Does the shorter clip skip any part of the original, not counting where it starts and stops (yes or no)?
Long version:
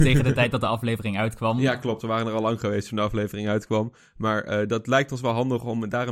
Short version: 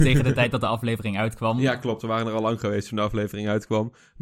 no